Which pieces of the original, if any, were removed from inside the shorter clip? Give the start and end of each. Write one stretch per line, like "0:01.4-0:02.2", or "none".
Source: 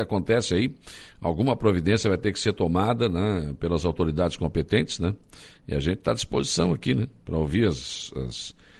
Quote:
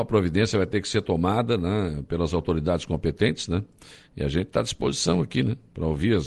none